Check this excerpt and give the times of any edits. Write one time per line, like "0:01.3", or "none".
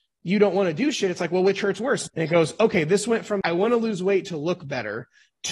0:02.1
0:03.4